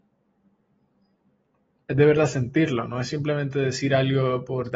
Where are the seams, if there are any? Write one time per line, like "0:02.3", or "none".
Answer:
0:01.8